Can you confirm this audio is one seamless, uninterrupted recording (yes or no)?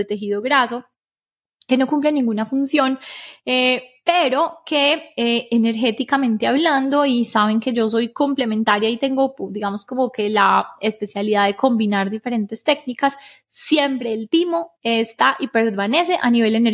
yes